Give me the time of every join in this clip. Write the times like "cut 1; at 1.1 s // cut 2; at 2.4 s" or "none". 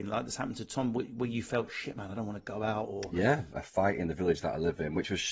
cut 1; at 3.5 s